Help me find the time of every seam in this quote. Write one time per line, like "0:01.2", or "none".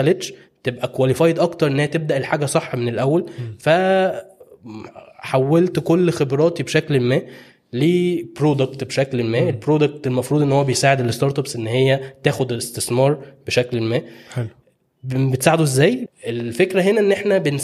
0:16.1